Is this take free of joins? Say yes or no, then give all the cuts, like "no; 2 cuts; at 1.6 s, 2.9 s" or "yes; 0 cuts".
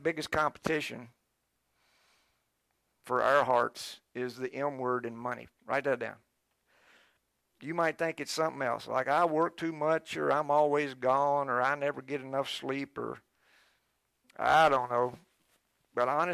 yes; 0 cuts